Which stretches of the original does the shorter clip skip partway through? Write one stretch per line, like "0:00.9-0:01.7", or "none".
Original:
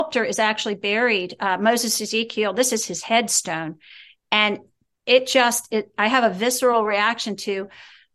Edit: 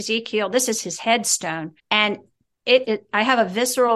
0:03.8-0:04.2
0:05.2-0:05.7